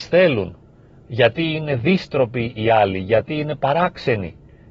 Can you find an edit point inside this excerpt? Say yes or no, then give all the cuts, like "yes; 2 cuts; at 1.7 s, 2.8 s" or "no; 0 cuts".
no; 0 cuts